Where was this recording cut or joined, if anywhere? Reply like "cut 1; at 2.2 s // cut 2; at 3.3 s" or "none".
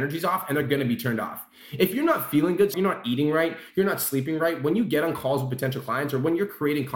cut 1; at 2.7 s